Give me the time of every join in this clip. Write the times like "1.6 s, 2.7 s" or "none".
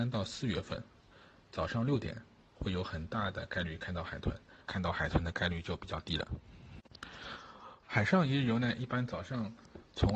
4.7 s, 7.8 s